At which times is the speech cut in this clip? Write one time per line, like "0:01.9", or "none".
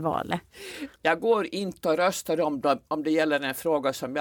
0:01.0